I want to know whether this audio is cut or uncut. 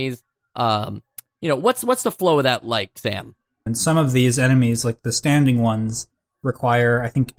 cut